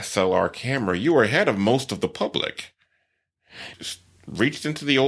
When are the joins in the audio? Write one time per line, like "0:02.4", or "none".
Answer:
0:03.7

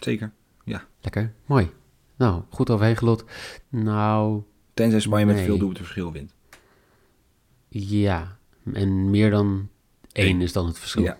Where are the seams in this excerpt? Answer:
0:00.9
0:03.6

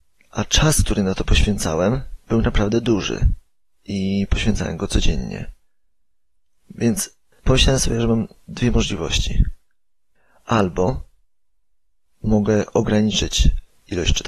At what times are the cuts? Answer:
none

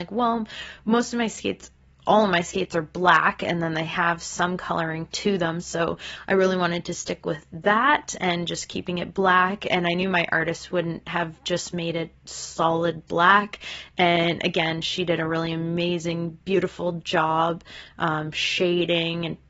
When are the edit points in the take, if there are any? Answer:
none

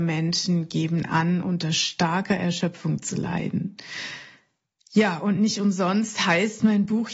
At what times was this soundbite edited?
none

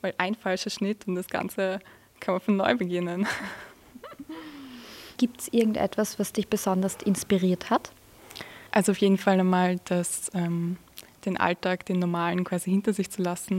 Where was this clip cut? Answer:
0:05.2
0:08.7

